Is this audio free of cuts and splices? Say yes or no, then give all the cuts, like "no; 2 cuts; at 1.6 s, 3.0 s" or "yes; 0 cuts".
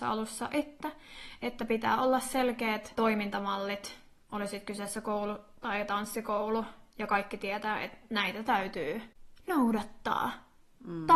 no; 1 cut; at 2.9 s